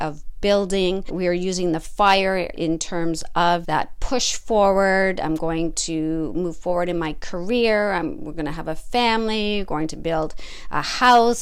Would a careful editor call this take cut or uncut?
uncut